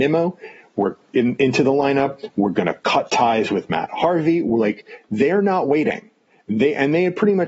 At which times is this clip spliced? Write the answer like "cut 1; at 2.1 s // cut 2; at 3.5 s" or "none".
none